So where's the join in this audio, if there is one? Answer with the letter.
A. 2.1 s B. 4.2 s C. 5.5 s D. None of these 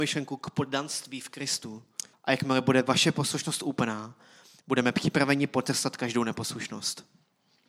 A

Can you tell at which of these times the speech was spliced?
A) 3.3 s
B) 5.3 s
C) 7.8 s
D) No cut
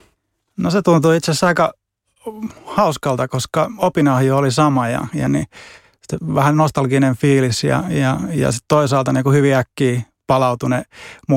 B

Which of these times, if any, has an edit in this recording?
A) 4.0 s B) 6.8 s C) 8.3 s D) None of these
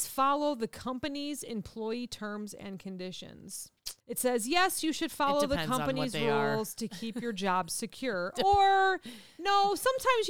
A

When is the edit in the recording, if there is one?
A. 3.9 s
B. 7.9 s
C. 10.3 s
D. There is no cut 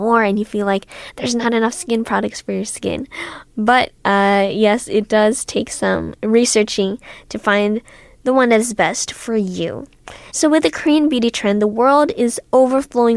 C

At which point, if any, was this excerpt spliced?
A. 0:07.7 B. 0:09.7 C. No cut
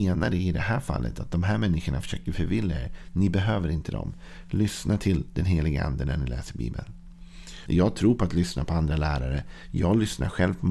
A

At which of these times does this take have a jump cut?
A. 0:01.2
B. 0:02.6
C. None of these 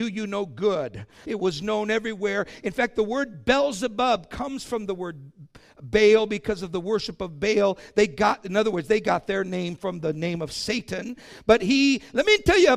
A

